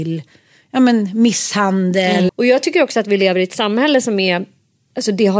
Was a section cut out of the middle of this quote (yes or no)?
yes